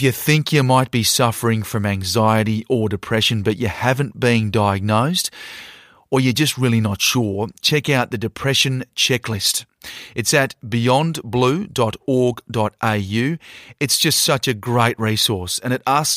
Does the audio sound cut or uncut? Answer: uncut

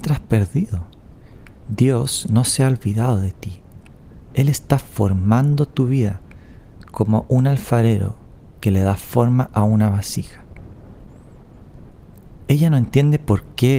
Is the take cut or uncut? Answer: cut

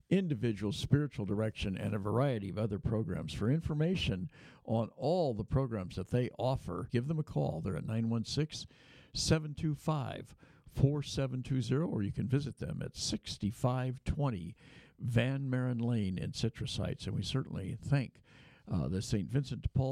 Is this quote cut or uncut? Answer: cut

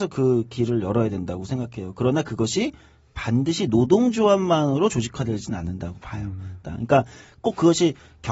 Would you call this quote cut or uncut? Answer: cut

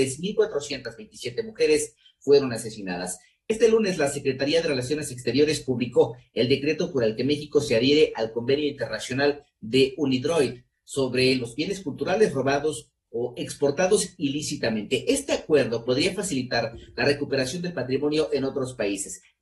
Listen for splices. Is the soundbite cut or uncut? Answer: uncut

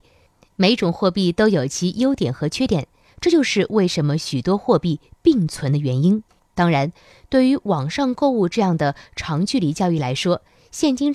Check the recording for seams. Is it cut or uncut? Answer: cut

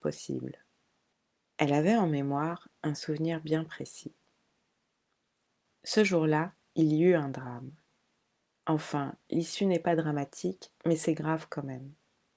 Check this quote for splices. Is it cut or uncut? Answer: uncut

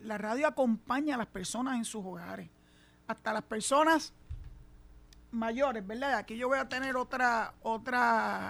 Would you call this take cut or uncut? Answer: uncut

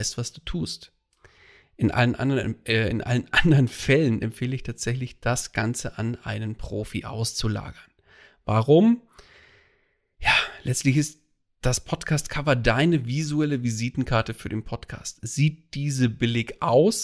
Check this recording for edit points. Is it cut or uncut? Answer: uncut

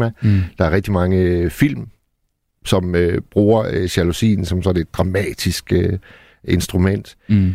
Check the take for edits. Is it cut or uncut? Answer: uncut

